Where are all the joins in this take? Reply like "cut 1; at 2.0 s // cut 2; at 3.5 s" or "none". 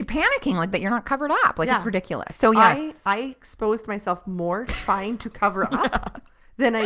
none